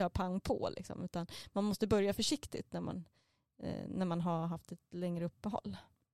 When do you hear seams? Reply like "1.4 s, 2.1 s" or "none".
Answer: none